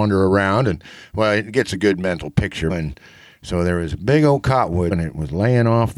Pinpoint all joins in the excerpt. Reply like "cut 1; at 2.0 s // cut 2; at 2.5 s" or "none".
cut 1; at 2.7 s // cut 2; at 4.9 s